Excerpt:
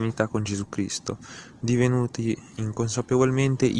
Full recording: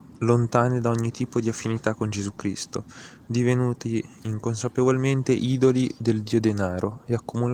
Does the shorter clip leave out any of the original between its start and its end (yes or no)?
no